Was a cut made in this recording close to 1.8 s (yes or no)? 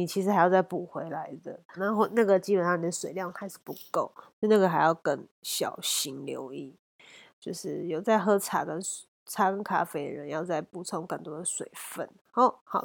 yes